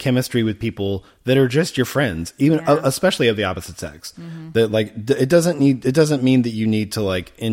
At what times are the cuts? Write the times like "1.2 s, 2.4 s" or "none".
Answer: none